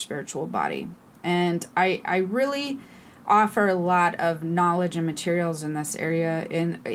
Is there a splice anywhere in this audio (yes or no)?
no